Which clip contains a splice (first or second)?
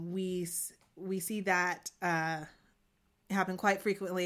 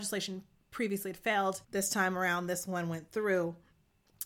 second